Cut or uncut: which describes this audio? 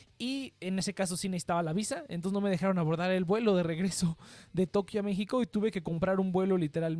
uncut